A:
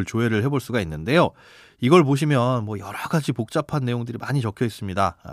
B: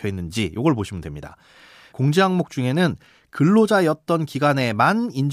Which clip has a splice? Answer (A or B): B